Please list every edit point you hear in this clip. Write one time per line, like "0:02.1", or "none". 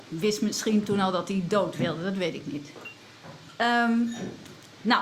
none